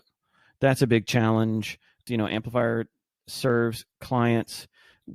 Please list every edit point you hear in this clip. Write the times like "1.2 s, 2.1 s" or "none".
2.1 s